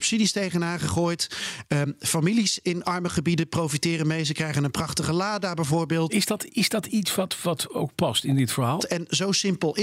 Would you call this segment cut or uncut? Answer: cut